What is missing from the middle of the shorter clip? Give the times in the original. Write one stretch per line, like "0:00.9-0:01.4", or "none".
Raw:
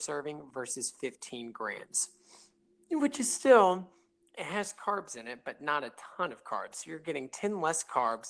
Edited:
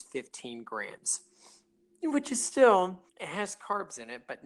0:04.0-0:04.3

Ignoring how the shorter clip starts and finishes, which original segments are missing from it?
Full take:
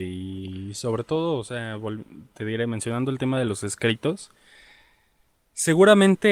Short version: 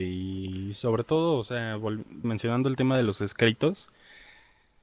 0:02.2-0:02.7

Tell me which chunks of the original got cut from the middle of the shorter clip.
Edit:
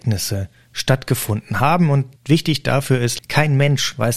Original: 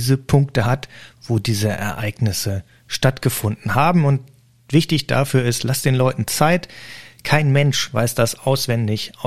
0:04.3-0:04.6
0:05.6-0:07.1

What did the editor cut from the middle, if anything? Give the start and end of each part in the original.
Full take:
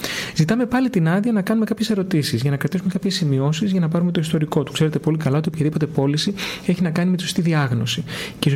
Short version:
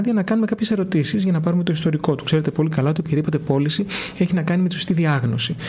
0:02.3-0:03.6

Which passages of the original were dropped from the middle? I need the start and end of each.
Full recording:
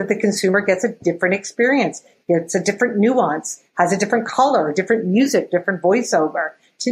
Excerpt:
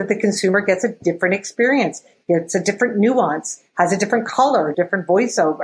0:04.7-0:05.5

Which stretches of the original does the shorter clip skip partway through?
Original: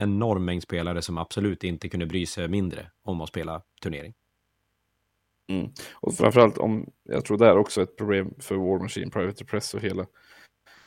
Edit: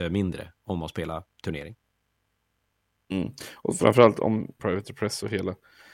0:07.0-0:09.1

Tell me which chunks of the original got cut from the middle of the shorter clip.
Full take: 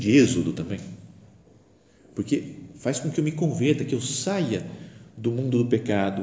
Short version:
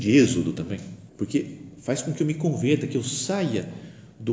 0:01.1-0:02.1

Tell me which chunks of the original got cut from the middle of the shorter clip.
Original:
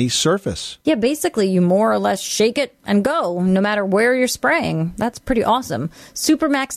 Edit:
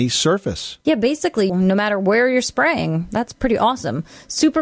0:01.5-0:03.4

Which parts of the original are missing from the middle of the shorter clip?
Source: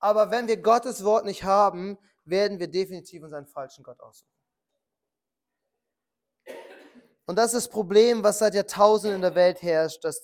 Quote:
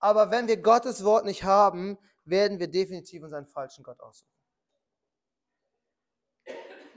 none

